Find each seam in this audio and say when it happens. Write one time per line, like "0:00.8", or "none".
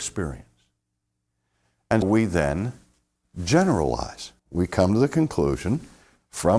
0:02.0
0:04.4